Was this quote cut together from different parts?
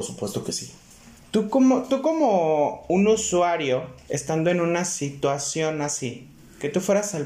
yes; 2 cuts; at 1.2 s, 4.1 s

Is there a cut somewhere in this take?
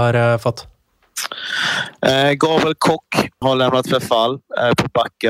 yes; 1 cut; at 3.4 s

